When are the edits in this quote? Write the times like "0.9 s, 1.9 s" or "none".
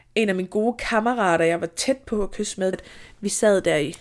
2.7 s